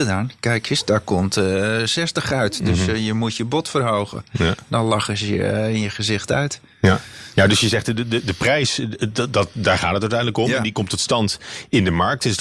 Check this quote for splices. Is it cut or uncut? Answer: uncut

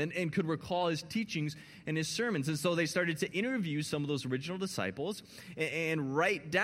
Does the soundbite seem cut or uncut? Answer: uncut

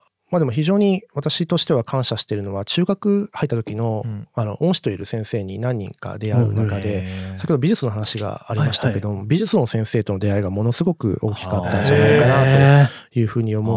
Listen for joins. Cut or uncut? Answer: uncut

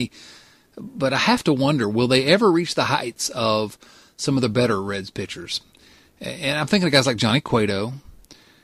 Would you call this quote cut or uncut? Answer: uncut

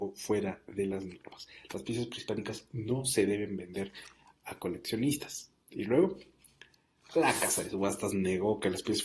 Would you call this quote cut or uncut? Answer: uncut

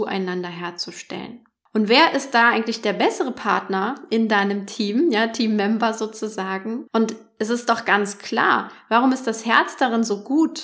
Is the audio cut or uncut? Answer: cut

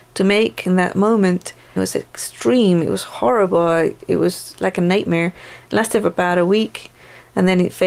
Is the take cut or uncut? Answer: cut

